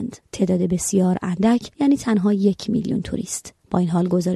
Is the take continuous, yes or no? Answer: no